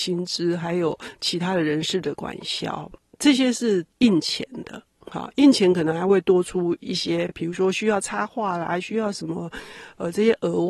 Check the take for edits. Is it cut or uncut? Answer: uncut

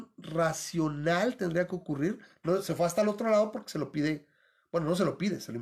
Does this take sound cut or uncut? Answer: uncut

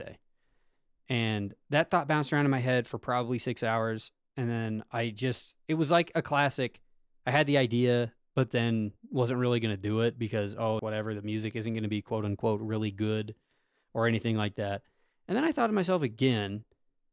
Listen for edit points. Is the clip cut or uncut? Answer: cut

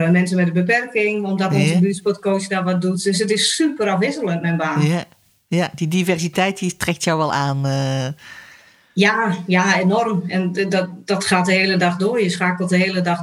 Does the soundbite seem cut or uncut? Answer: uncut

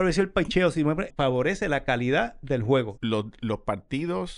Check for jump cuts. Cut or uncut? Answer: cut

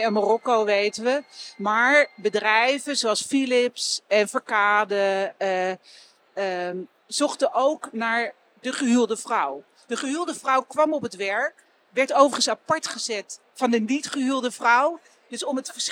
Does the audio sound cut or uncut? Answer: uncut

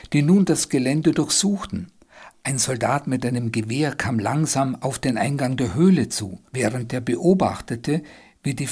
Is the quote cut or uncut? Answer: cut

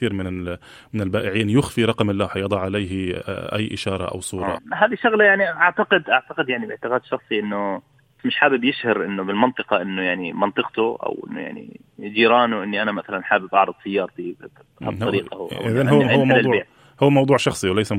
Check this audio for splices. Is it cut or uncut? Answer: cut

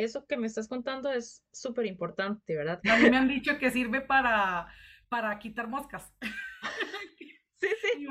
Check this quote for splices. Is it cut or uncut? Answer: cut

